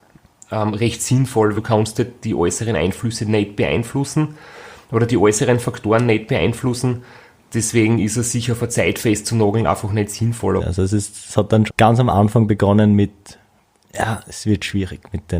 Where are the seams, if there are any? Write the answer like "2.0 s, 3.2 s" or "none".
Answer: 1.6 s, 10.6 s, 11.7 s